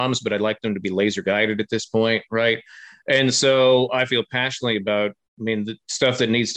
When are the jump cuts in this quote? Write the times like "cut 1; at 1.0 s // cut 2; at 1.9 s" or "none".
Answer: none